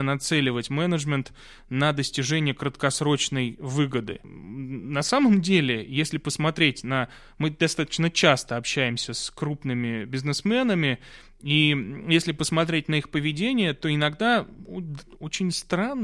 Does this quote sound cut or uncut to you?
uncut